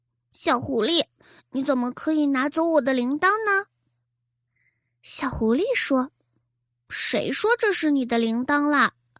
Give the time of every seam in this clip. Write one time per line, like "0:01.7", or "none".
none